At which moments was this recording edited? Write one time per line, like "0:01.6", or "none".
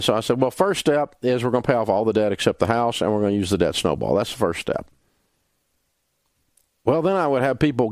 none